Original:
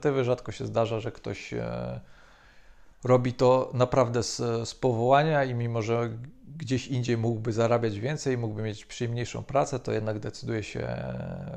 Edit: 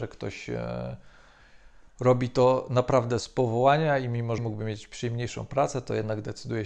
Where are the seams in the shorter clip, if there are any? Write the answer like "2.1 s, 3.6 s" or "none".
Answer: 3.2 s, 4.4 s